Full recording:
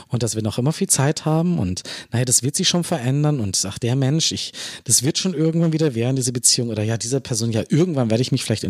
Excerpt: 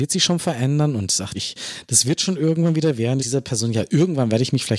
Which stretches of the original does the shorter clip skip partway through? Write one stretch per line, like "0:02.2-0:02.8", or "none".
0:03.8-0:04.3
0:06.2-0:07.0